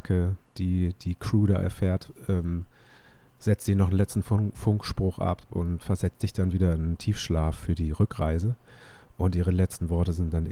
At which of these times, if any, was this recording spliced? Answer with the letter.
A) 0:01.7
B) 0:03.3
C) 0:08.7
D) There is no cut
D